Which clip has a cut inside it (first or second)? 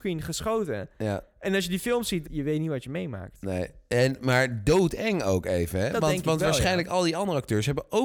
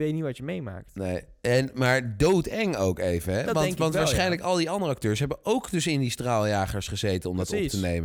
first